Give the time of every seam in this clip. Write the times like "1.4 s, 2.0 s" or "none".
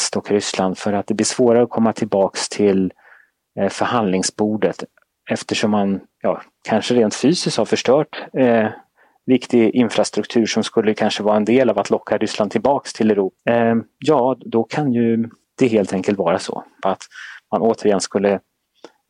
13.4 s, 16.8 s